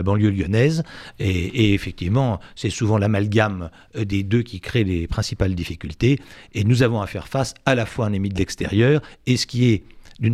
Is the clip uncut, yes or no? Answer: yes